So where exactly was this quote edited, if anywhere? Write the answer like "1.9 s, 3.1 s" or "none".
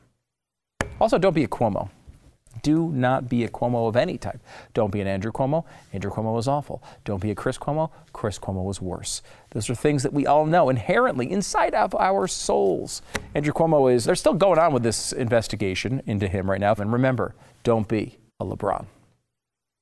14.0 s, 16.8 s, 18.3 s